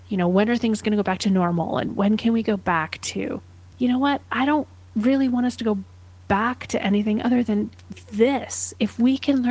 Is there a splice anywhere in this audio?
no; 0 cuts

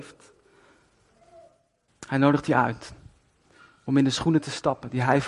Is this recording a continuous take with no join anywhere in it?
no; 1 cut; at 1.9 s

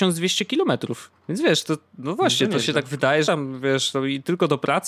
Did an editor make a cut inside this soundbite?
yes; 2 cuts; at 1.2 s, 3.2 s

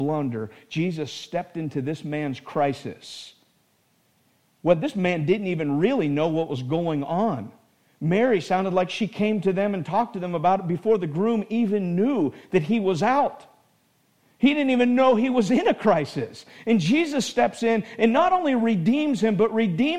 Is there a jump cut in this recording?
no; 0 cuts

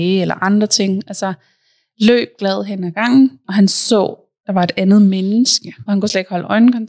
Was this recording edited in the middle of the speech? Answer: yes; 2 cuts; at 3.4 s, 5.9 s

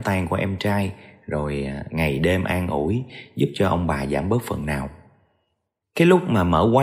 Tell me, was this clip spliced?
no; 0 cuts

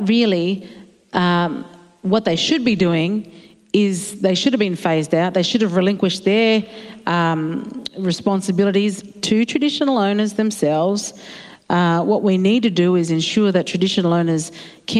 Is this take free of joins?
yes; 0 cuts

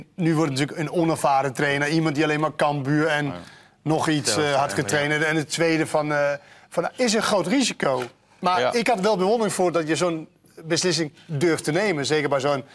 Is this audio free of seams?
yes; 0 cuts

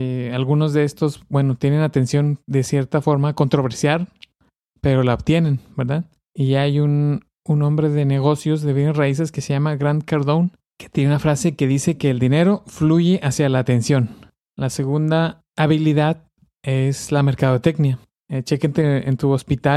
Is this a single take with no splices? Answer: no; 2 cuts; at 14.4 s, 18.1 s

